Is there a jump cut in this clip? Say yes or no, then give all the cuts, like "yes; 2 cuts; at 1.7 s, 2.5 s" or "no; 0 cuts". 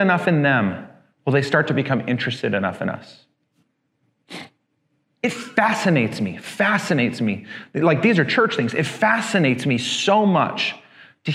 no; 0 cuts